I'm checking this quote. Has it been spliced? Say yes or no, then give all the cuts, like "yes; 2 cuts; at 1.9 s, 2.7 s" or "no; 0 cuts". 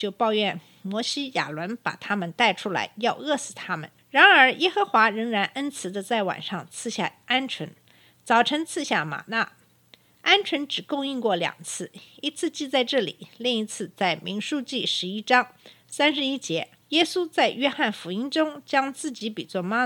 yes; 2 cuts; at 4.0 s, 16.8 s